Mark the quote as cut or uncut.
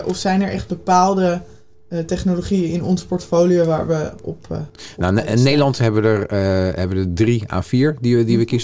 uncut